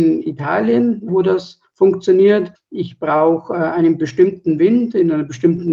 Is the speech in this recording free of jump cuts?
no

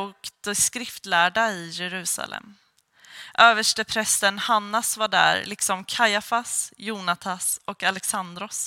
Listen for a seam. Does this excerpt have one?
no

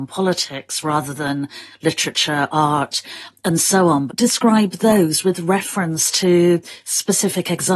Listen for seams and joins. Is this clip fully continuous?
no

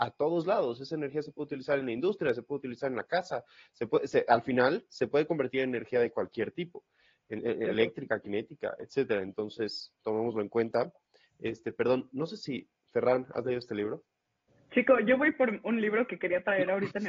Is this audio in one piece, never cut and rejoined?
yes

